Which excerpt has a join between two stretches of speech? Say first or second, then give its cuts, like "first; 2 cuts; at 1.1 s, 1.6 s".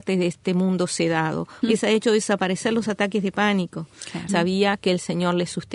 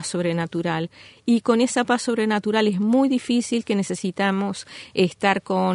first; 2 cuts; at 1.6 s, 4.3 s